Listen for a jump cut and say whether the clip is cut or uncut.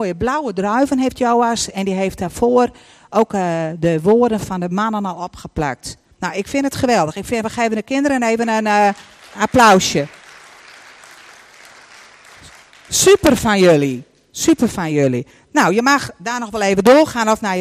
uncut